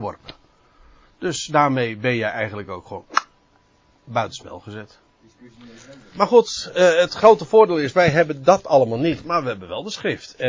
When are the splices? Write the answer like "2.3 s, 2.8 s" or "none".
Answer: 6.1 s